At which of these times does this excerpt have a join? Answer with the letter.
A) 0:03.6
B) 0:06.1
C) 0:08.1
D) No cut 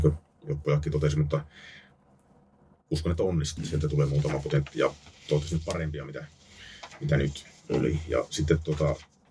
A